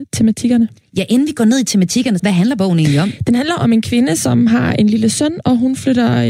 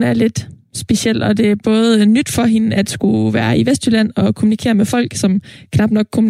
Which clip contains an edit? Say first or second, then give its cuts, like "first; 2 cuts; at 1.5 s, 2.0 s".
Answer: first; 1 cut; at 2.2 s